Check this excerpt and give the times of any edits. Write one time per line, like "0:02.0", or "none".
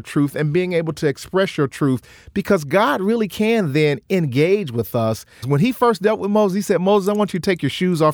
0:05.4